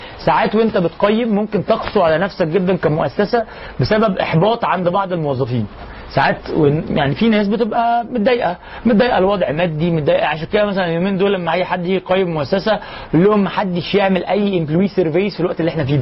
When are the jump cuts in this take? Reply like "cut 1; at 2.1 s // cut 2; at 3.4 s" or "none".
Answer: cut 1; at 6.8 s